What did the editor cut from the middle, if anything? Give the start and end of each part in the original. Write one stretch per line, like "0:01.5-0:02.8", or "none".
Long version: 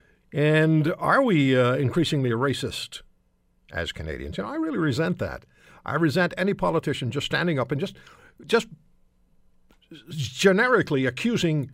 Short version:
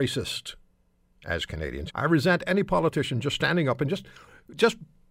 0:04.4-0:05.8